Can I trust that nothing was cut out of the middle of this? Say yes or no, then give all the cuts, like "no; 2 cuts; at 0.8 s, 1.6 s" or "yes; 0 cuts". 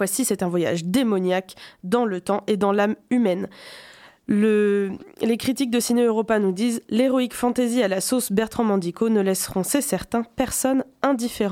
yes; 0 cuts